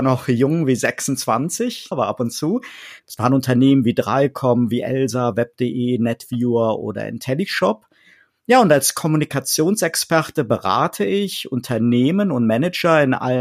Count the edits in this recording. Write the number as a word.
two